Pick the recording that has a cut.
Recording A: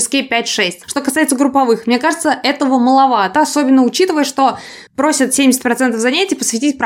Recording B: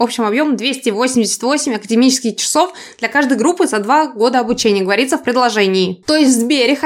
A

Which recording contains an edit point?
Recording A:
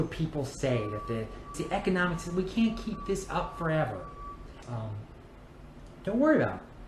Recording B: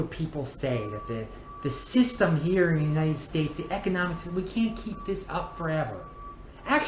A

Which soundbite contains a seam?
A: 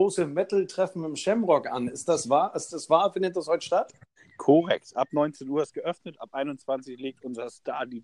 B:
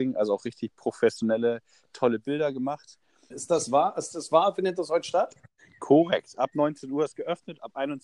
B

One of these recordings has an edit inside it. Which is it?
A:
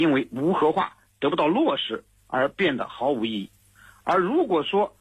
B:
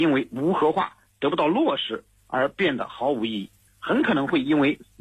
B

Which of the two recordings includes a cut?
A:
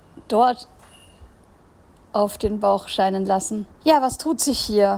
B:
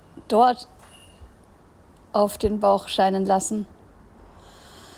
A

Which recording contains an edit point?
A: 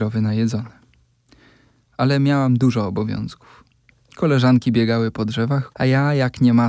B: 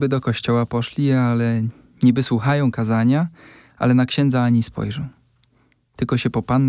A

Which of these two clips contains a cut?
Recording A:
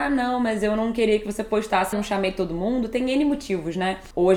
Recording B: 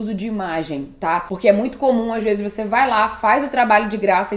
A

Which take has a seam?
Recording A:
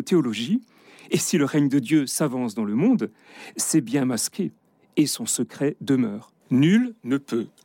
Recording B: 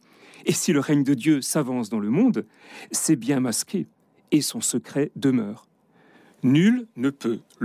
A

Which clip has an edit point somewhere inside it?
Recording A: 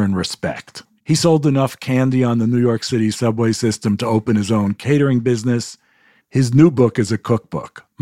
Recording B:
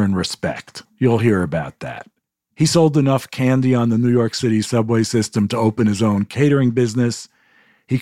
A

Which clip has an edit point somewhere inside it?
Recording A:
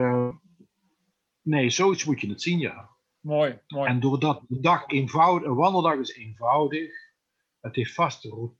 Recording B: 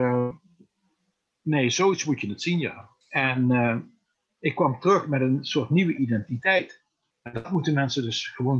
B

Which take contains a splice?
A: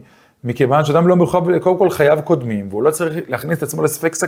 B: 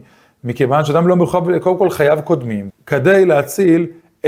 B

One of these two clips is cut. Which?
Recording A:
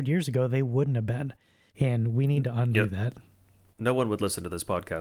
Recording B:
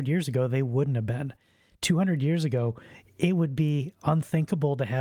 A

